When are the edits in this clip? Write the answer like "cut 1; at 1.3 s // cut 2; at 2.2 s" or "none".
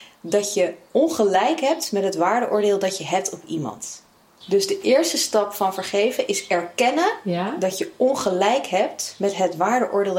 cut 1; at 4.4 s